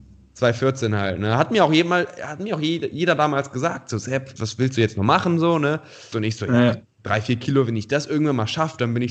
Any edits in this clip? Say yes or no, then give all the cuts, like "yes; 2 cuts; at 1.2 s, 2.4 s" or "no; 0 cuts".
yes; 2 cuts; at 4.4 s, 6.1 s